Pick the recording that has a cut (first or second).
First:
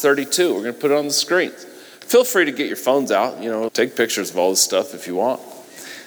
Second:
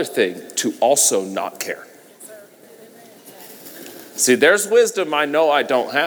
first